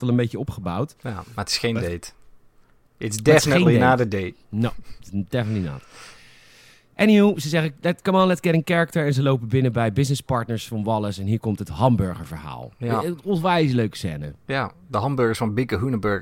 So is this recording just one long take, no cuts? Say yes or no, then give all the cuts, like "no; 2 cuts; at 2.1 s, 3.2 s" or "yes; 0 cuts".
yes; 0 cuts